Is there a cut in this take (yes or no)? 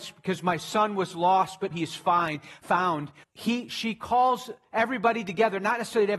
yes